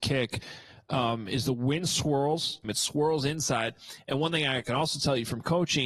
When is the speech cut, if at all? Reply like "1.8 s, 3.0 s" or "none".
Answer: 2.6 s